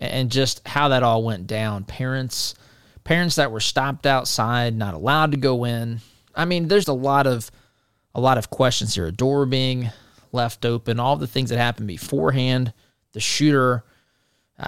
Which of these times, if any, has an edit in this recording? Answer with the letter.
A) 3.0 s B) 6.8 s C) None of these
B